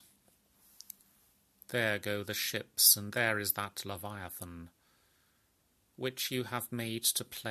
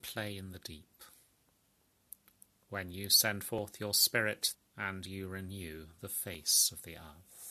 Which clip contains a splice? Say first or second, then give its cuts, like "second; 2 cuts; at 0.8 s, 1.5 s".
second; 2 cuts; at 2.6 s, 4.5 s